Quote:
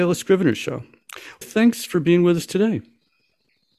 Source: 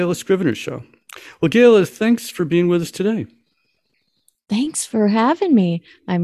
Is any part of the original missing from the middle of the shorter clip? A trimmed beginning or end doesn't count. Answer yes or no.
yes